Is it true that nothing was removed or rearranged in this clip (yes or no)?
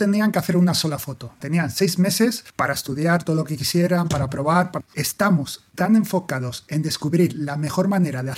no